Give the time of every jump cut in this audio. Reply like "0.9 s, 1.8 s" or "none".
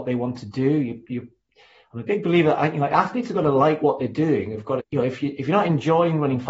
4.8 s